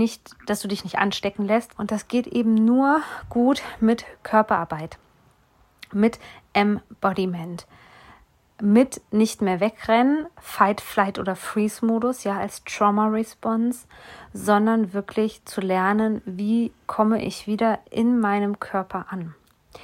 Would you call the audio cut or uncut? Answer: cut